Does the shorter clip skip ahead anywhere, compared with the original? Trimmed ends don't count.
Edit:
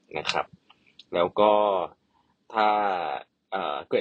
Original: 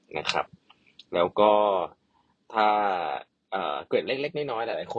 no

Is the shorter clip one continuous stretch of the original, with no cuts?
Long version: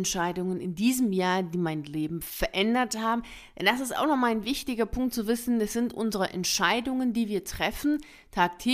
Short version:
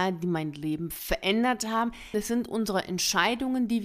no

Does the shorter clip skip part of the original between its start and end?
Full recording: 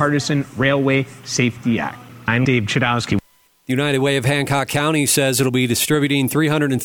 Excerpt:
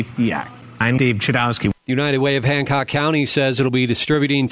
yes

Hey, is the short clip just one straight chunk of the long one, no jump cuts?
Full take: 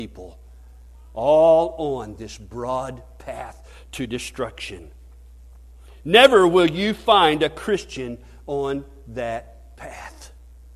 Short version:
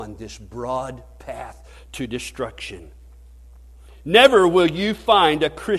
yes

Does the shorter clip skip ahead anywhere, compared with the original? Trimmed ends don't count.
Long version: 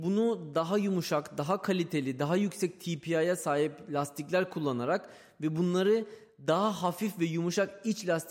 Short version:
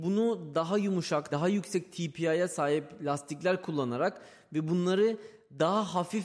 yes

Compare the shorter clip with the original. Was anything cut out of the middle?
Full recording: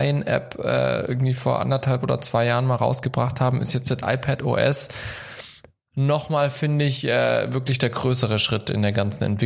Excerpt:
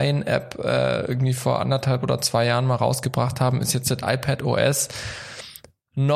no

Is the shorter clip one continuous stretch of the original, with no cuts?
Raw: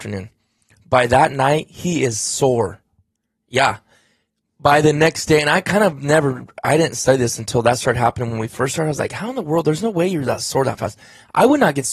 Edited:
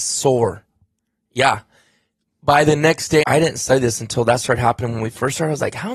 no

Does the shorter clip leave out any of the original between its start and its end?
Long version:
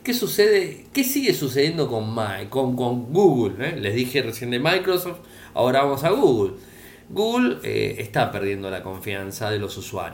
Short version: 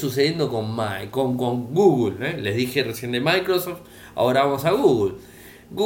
no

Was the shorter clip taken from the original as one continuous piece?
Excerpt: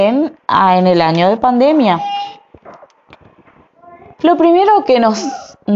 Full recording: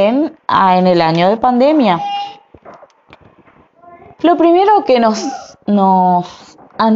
yes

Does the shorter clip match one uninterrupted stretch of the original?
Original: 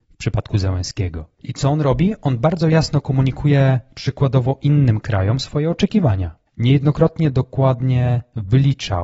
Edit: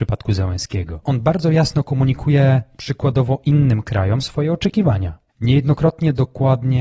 no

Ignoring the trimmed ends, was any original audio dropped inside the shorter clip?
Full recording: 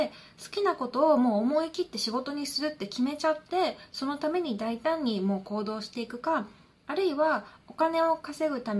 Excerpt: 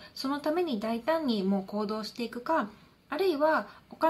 no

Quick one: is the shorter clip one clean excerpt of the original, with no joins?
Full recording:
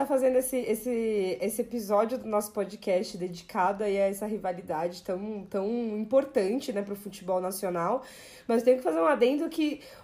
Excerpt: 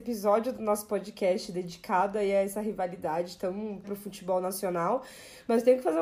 no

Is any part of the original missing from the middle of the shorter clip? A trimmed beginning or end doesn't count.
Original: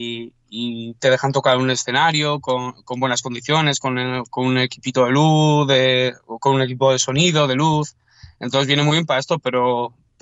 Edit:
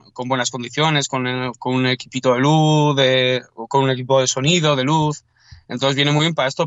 no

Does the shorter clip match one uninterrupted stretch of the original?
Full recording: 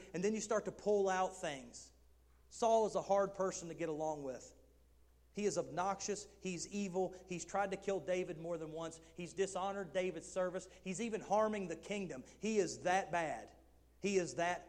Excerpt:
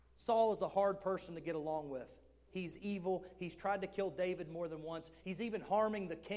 no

